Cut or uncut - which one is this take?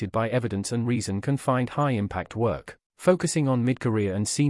cut